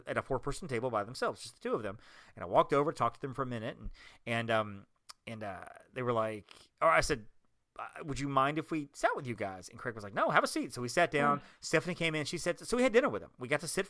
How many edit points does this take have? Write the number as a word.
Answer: zero